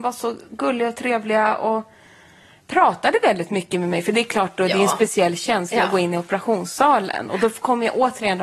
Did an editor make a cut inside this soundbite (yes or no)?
yes